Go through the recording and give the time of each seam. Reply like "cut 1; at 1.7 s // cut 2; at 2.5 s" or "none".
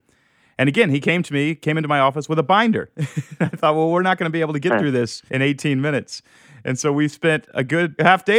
cut 1; at 5.3 s